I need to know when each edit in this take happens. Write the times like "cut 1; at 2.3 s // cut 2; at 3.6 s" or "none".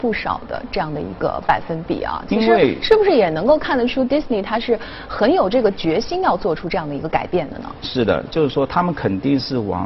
none